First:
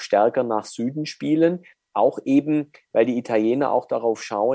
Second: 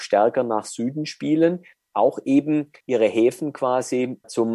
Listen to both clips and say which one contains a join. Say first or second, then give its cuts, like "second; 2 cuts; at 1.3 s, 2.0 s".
second; 1 cut; at 2.8 s